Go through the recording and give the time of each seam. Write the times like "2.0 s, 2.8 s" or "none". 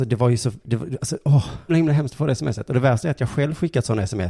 1.7 s